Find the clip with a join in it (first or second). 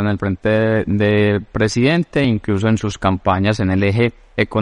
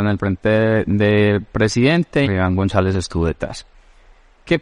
second